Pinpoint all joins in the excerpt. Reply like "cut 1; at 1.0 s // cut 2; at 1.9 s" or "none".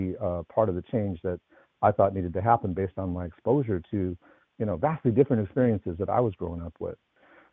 none